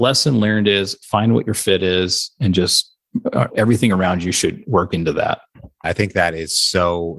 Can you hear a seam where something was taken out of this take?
yes; 2 cuts; at 3.5 s, 5.8 s

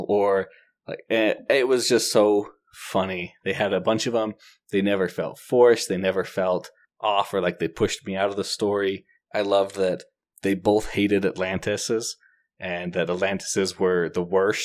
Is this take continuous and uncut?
yes; 0 cuts

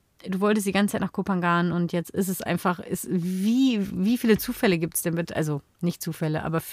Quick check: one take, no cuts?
yes; 0 cuts

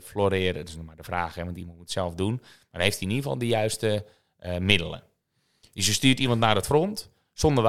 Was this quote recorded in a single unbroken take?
yes; 0 cuts

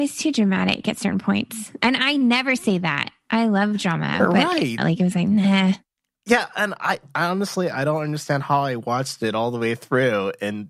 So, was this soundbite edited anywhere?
yes; 1 cut; at 4.8 s

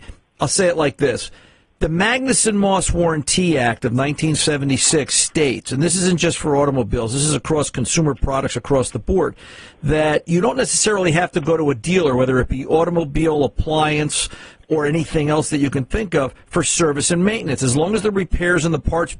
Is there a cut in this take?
no; 0 cuts

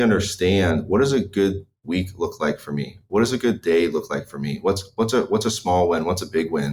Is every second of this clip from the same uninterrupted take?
yes; 0 cuts

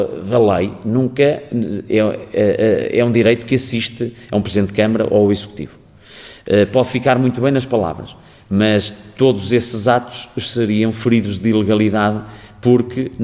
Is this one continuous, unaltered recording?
yes; 0 cuts

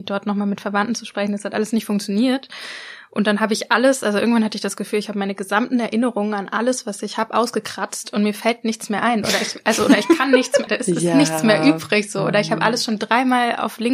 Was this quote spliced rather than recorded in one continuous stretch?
yes; 1 cut; at 10.7 s

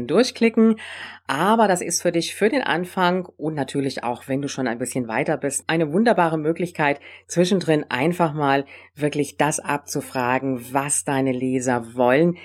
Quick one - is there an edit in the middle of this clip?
no; 0 cuts

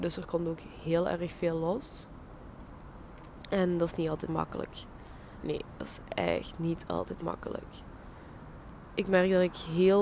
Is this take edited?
yes; 2 cuts; at 4.3 s, 7.2 s

